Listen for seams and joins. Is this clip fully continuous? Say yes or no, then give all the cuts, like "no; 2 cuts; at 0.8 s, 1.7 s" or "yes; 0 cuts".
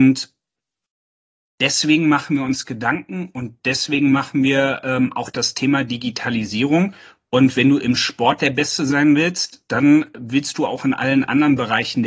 yes; 0 cuts